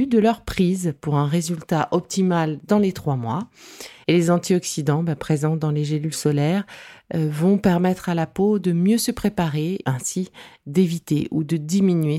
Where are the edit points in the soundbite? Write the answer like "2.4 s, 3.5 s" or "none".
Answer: 4.0 s